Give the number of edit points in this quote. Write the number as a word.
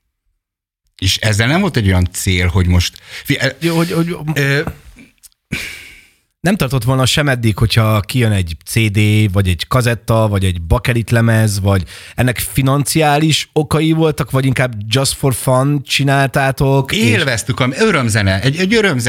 one